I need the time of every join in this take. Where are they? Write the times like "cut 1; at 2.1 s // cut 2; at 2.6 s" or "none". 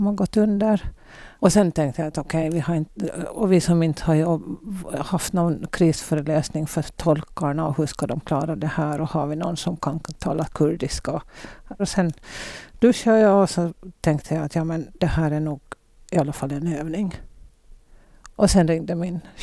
cut 1; at 1.4 s // cut 2; at 11.8 s // cut 3; at 18.3 s